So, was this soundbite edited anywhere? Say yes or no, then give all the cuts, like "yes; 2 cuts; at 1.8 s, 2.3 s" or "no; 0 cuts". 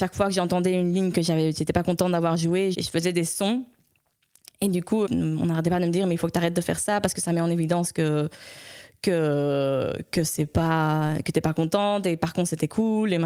yes; 2 cuts; at 2.7 s, 5.1 s